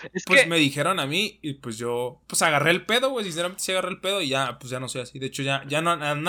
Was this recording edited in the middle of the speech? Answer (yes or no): no